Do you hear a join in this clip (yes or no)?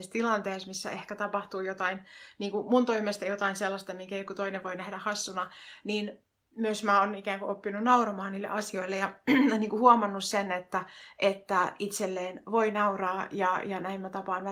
no